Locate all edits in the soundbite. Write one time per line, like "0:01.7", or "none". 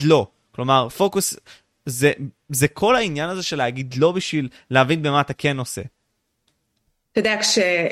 none